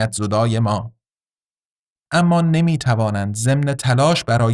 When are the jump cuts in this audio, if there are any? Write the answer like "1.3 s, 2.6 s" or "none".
2.1 s